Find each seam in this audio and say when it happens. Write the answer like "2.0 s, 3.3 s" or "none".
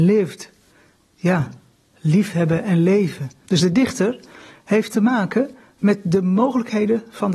3.4 s